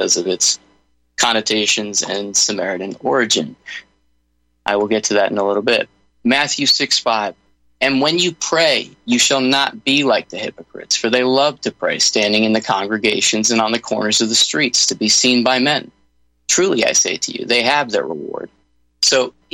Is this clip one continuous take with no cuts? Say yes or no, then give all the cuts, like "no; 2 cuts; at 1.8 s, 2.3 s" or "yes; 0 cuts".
yes; 0 cuts